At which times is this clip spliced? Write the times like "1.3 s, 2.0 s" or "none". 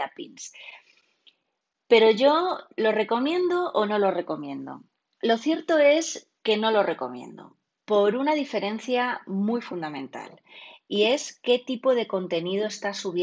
none